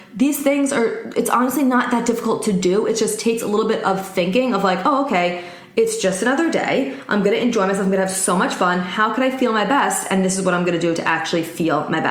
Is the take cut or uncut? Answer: uncut